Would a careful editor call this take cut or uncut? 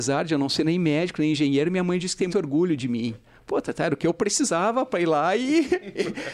cut